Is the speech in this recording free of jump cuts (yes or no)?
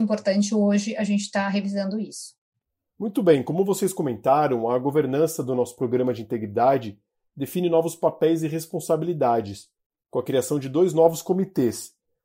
yes